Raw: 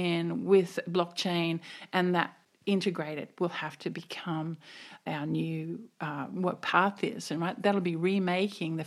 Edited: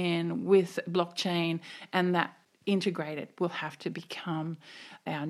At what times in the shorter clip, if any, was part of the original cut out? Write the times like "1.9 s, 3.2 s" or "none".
none